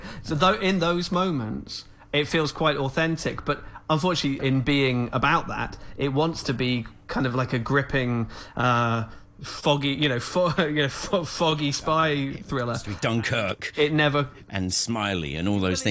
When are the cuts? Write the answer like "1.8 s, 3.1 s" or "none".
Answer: 4.4 s